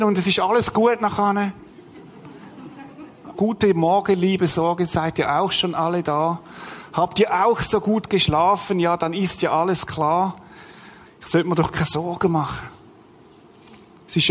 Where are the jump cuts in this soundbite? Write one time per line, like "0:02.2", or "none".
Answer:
0:03.3
0:11.1